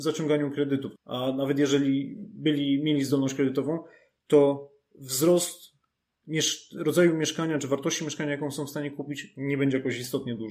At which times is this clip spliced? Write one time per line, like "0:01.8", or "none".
0:01.0